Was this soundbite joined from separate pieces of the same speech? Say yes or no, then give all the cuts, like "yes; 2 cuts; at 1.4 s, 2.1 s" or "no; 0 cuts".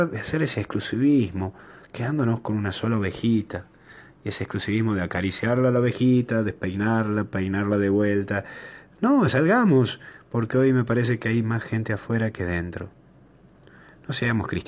yes; 1 cut; at 9.3 s